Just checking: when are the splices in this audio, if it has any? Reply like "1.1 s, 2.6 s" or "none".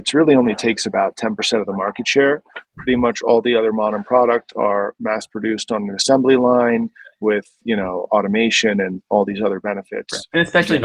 2.6 s